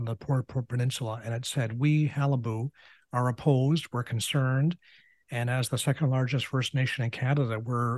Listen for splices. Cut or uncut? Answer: uncut